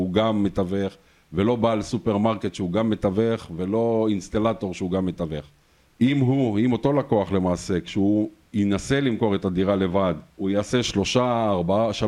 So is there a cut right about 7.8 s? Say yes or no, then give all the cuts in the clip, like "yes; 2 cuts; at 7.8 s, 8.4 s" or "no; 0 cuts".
no; 2 cuts; at 5.9 s, 10.3 s